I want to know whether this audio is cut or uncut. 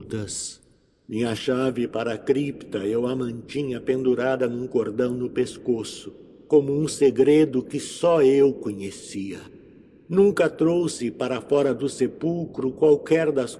uncut